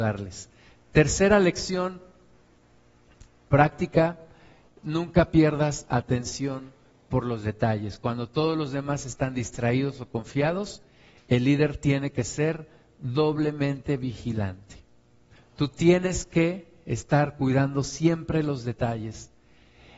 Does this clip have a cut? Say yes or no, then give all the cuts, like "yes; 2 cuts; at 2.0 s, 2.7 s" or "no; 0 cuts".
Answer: no; 0 cuts